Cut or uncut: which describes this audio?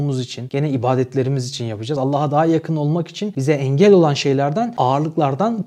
uncut